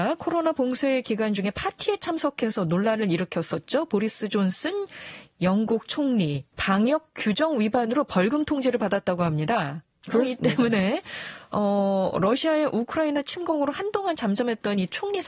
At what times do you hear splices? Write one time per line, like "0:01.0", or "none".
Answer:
0:06.5